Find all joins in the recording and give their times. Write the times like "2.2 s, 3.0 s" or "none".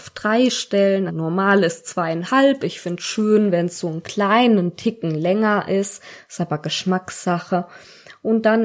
1.1 s